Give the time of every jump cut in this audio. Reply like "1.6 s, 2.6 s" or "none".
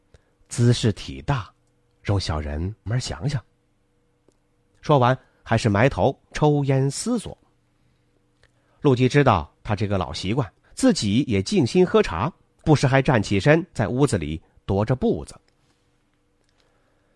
2.9 s, 10.6 s